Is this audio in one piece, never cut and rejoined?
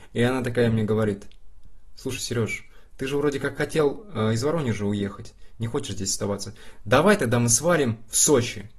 yes; 0 cuts

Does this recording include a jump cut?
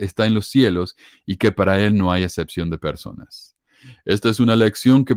no; 0 cuts

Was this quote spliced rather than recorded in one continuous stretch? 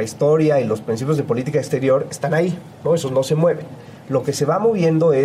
no; 0 cuts

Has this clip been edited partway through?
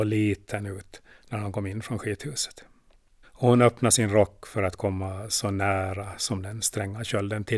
yes; 1 cut; at 3.2 s

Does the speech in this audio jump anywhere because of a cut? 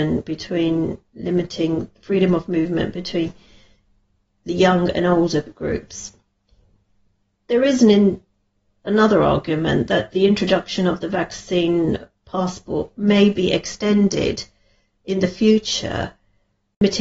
no; 0 cuts

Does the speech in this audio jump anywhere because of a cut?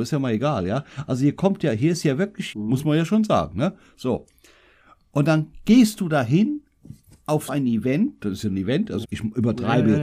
yes; 3 cuts; at 2.5 s, 7.5 s, 9.0 s

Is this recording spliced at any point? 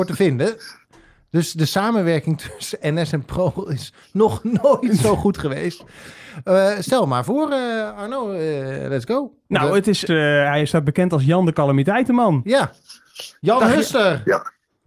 yes; 1 cut; at 10.1 s

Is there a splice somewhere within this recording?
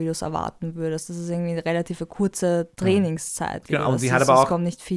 no; 0 cuts

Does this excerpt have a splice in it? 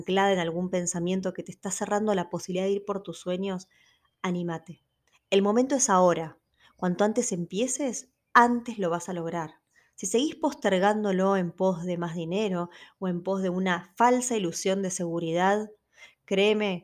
no; 0 cuts

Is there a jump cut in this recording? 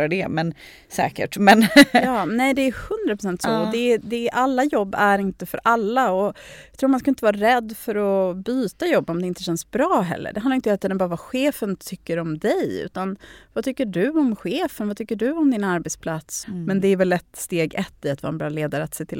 yes; 1 cut; at 16.4 s

